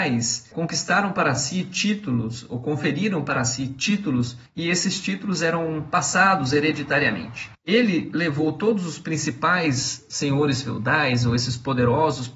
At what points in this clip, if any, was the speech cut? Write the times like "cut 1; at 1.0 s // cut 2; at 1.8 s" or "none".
cut 1; at 7.6 s